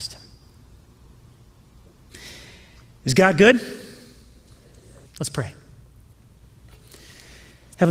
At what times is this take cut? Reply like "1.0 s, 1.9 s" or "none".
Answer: 5.1 s